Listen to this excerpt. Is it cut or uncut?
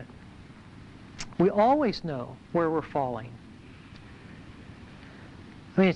cut